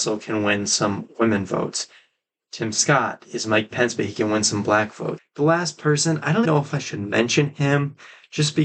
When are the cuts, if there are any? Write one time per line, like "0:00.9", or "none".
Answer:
0:05.2
0:06.4

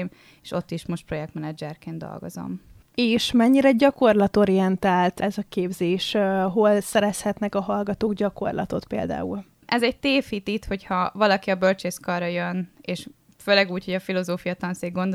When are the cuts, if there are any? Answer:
none

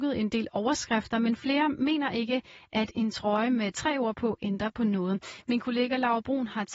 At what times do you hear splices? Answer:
none

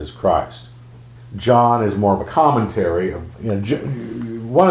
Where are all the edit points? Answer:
0:01.2
0:03.3

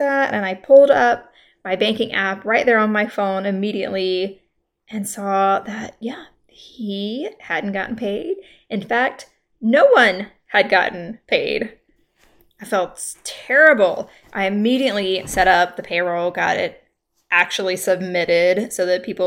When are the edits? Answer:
none

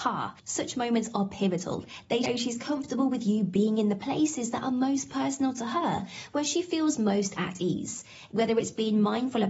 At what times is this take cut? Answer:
0:02.2
0:08.3

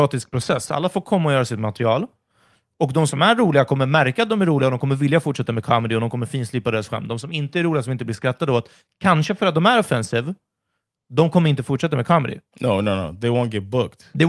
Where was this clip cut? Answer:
none

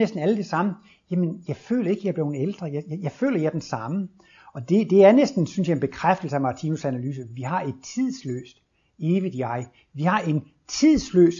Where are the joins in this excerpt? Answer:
none

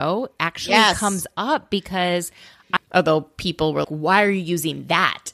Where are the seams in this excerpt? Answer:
0:02.8
0:03.8

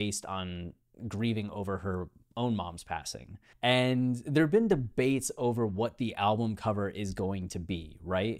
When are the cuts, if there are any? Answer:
0:03.5

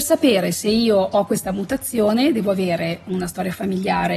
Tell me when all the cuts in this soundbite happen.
none

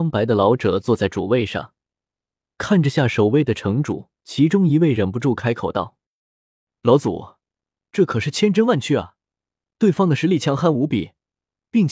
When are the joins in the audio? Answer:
0:04.2

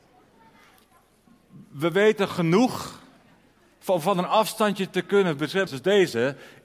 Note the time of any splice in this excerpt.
0:05.7

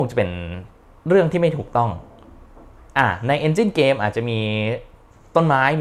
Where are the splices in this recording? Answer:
none

